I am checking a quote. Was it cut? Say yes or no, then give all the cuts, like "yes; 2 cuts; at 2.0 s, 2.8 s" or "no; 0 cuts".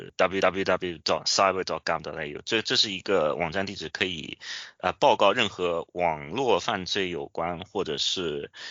no; 0 cuts